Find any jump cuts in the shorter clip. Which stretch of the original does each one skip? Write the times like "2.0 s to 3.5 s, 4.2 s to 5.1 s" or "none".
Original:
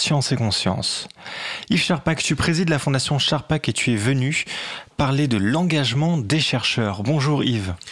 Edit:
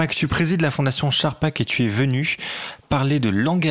none

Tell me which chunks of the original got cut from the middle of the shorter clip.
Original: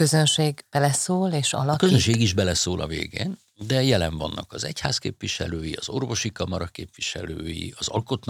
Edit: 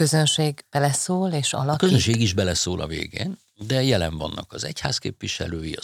none

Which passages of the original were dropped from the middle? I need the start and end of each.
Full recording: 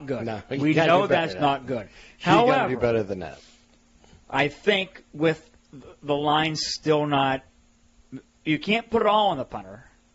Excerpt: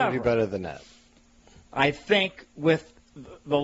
none

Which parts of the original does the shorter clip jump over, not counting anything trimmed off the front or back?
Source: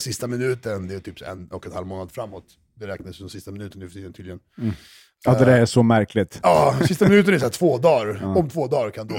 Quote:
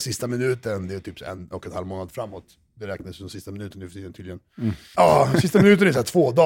4.9 s to 6.4 s

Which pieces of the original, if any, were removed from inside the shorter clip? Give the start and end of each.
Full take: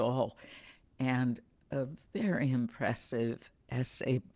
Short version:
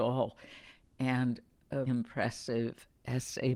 1.9 s to 2.5 s

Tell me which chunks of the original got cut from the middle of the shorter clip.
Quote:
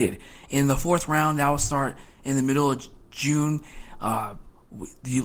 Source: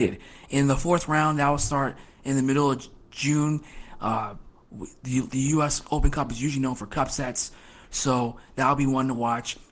none

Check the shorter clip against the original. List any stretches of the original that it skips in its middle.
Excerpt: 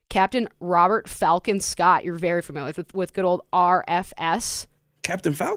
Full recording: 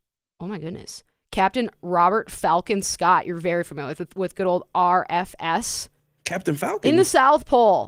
none

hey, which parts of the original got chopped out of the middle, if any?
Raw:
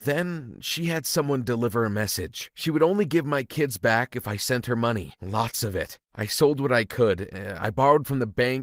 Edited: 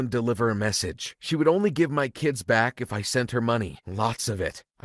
none

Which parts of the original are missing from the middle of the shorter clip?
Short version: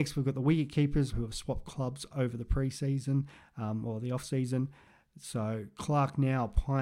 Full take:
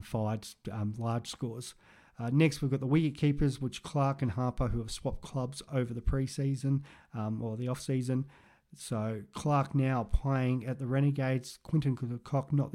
3.6 s to 4.7 s

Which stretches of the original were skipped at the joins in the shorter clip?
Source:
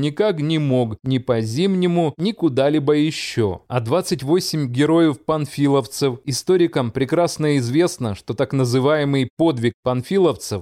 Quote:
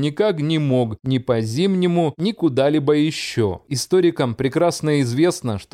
3.7 s to 6.2 s

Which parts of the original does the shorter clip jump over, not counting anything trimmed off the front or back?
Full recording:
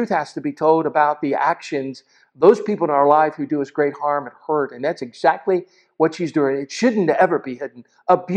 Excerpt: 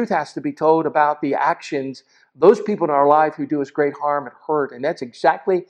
none

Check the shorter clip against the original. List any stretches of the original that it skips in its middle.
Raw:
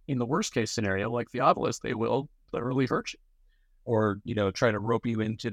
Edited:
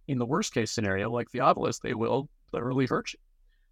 none

